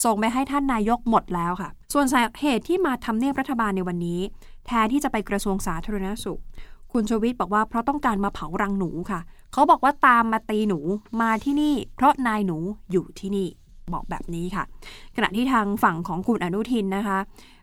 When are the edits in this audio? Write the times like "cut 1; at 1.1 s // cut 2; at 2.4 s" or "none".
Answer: cut 1; at 1.8 s